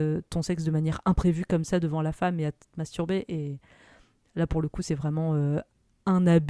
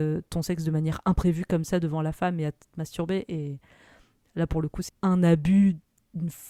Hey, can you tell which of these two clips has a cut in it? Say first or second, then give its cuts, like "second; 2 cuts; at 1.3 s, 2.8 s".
second; 1 cut; at 4.9 s